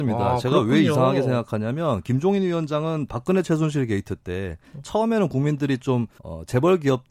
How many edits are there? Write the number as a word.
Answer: one